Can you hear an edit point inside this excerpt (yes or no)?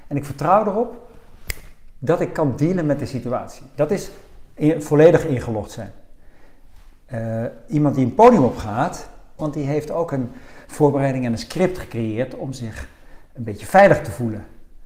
yes